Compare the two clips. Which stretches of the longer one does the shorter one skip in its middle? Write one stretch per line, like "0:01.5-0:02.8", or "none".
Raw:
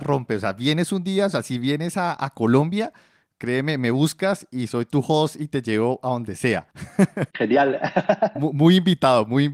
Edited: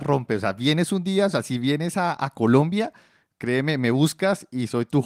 none